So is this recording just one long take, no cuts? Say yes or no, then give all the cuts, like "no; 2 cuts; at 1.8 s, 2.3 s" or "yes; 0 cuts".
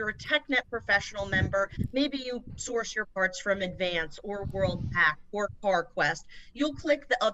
yes; 0 cuts